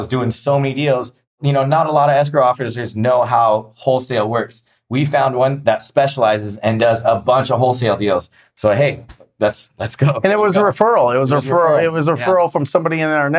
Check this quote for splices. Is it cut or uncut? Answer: uncut